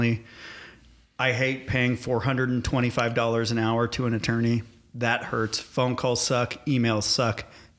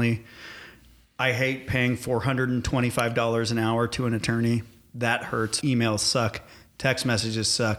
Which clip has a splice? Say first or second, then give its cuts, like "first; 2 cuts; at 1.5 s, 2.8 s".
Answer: second; 1 cut; at 5.6 s